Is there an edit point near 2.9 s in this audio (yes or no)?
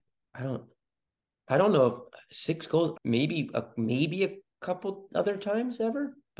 yes